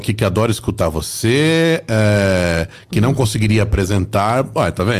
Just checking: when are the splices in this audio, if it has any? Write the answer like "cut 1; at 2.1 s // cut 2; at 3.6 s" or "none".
none

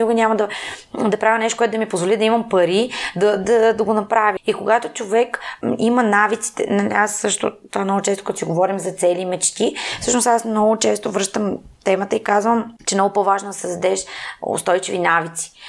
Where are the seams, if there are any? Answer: cut 1; at 4.4 s // cut 2; at 12.8 s

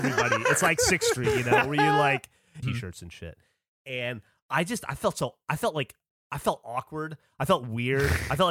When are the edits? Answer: cut 1; at 2.6 s

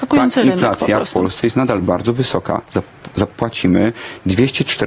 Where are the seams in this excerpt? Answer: cut 1; at 1.8 s

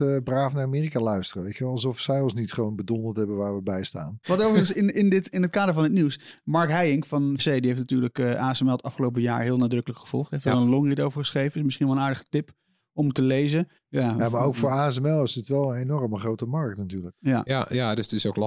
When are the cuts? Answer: cut 1; at 4.2 s // cut 2; at 7.4 s // cut 3; at 13.8 s

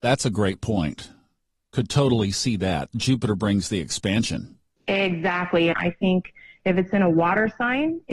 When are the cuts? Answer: cut 1; at 5.7 s

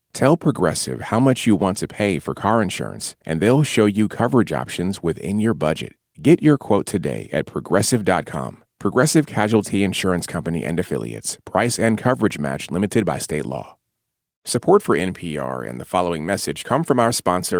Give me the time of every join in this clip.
none

